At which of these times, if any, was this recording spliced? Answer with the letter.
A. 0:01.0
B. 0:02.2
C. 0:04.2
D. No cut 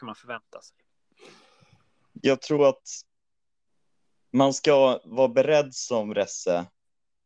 D